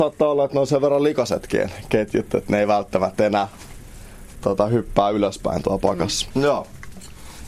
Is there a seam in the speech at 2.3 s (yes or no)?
no